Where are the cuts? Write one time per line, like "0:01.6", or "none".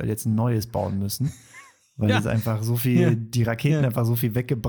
none